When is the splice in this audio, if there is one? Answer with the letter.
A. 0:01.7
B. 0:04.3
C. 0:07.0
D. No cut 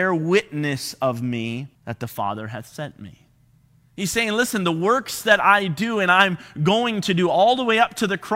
A